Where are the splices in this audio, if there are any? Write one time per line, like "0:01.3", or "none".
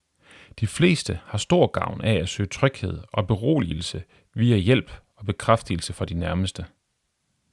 none